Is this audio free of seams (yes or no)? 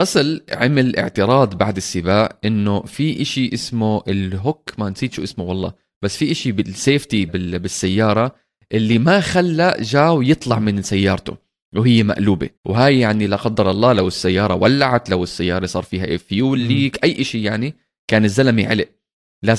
no